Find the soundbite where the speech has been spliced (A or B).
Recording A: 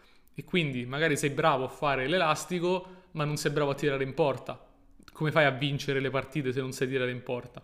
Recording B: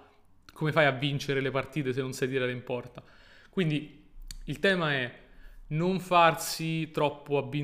A